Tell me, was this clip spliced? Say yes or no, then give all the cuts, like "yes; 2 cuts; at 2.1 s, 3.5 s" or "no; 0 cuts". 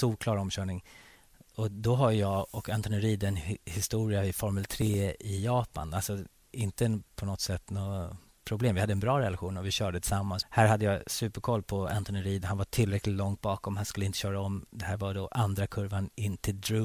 yes; 1 cut; at 10.4 s